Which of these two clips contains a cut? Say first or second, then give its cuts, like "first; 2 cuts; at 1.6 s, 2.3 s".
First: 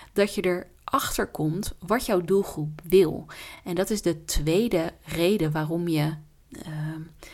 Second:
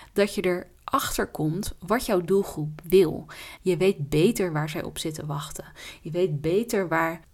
second; 1 cut; at 3.6 s